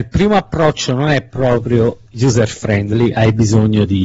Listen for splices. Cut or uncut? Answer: uncut